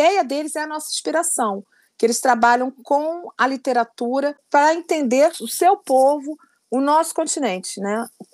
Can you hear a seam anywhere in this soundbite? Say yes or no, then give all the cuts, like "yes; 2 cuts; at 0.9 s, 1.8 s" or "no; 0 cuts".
no; 0 cuts